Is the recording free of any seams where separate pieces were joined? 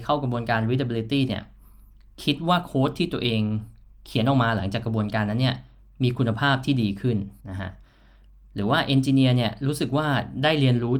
no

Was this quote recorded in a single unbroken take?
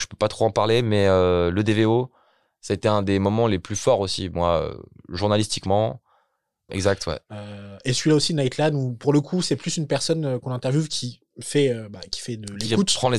no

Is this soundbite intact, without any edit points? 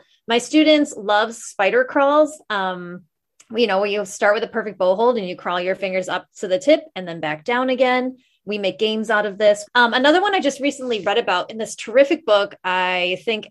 no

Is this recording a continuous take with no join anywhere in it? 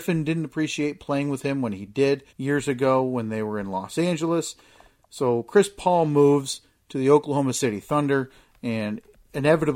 no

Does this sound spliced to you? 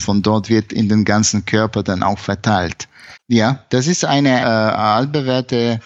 yes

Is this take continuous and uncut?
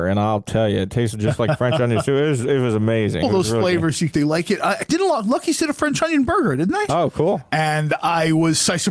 no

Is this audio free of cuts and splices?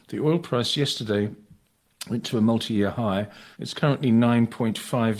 no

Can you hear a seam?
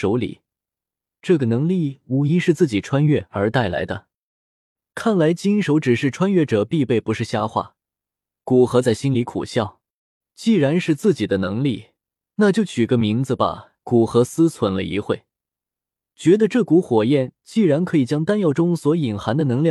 no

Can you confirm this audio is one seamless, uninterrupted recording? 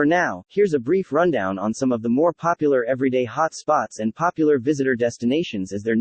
yes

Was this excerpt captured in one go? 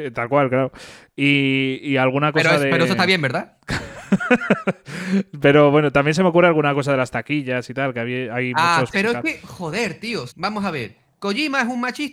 no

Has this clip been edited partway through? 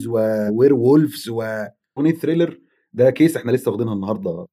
yes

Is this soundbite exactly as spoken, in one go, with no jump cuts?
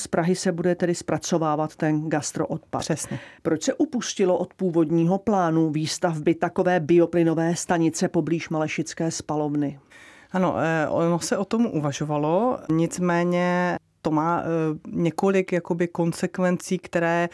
no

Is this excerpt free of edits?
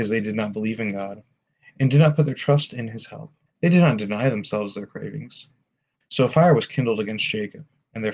no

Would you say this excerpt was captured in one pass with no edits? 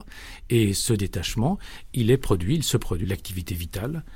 no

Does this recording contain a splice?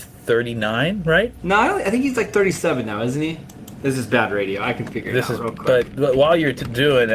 no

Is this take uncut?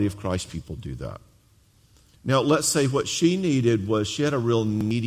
no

